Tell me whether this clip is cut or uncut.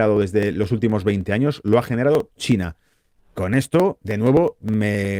uncut